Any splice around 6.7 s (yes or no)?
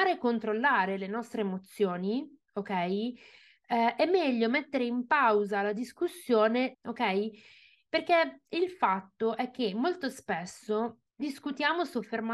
yes